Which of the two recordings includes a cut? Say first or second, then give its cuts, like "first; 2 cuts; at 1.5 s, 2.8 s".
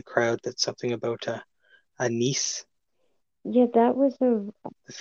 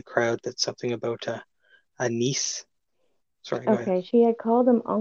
second; 1 cut; at 3.3 s